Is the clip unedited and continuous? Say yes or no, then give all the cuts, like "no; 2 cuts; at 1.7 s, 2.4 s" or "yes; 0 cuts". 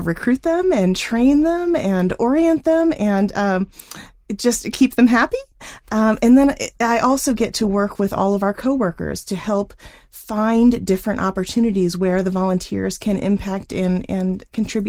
yes; 0 cuts